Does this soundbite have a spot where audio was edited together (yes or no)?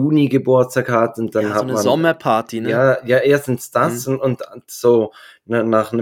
no